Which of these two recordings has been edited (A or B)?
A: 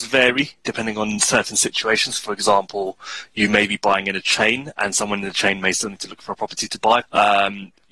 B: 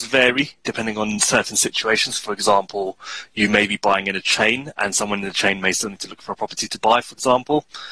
A